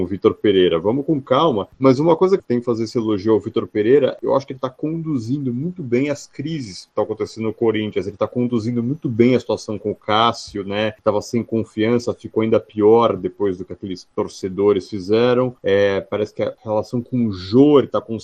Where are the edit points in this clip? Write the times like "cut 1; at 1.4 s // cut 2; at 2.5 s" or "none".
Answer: none

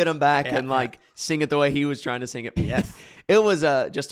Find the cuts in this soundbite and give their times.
cut 1; at 2.6 s

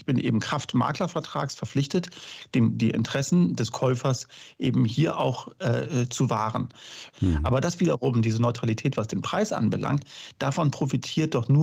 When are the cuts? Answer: cut 1; at 7.1 s

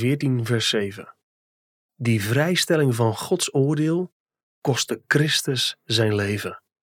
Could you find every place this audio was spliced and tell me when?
none

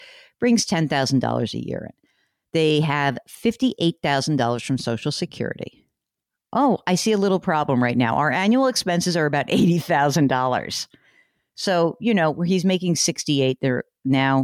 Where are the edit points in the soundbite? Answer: none

